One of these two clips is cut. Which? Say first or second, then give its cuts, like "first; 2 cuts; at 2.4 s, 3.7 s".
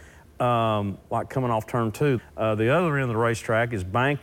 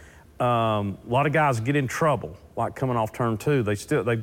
first; 2 cuts; at 1.0 s, 2.2 s